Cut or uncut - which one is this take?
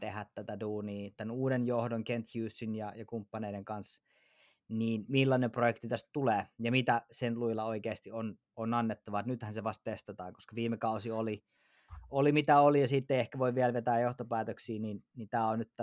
uncut